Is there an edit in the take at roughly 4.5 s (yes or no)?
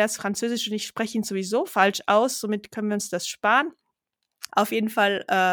yes